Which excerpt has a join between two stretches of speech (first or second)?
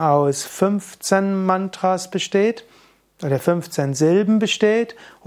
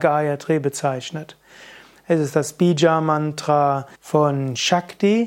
second